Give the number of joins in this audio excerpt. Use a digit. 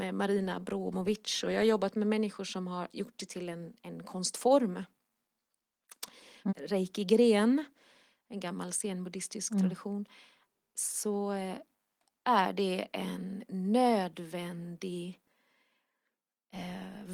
1